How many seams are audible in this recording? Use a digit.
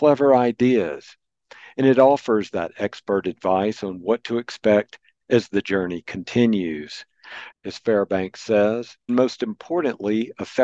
2